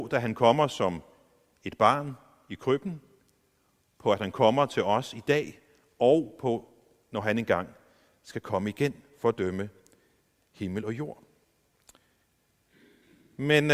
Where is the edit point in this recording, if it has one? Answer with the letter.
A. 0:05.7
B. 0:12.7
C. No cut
C